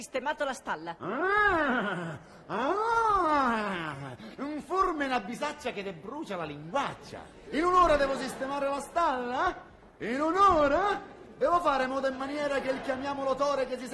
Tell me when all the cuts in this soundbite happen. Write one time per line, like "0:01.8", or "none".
none

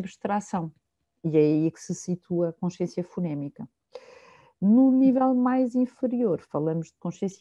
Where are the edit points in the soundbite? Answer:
none

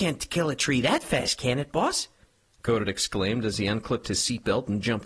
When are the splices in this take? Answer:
none

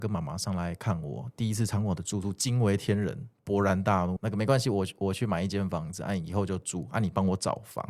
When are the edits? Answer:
0:04.2

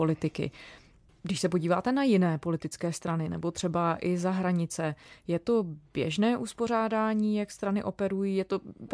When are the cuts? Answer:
none

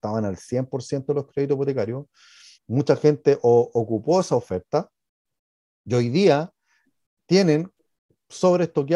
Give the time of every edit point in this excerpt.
none

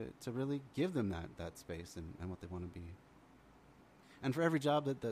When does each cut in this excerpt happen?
0:02.2

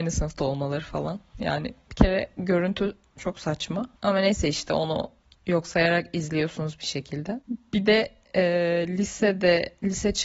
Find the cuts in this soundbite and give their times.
0:04.0

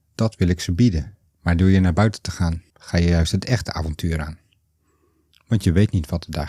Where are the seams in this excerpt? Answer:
0:01.3
0:02.7

